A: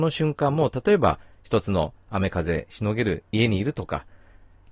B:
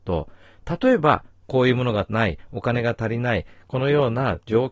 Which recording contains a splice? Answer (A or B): B